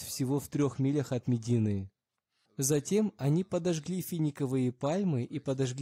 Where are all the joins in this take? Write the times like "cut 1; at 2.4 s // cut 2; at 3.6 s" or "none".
cut 1; at 2.5 s